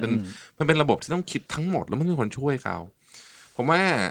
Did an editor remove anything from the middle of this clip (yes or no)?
yes